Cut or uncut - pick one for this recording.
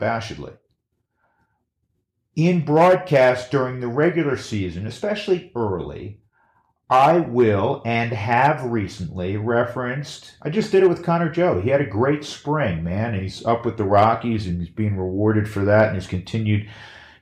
uncut